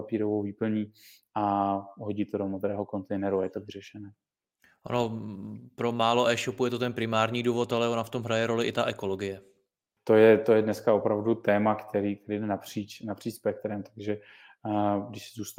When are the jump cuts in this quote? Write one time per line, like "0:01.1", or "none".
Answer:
0:10.0